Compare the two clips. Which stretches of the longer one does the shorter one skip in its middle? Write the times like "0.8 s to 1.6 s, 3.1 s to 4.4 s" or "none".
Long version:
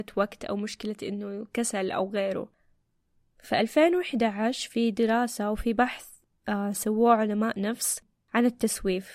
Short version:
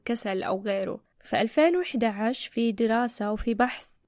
2.6 s to 3.3 s